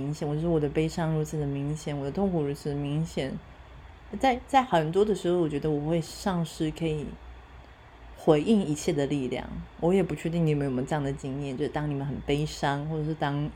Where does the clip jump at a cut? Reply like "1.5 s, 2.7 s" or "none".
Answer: 4.1 s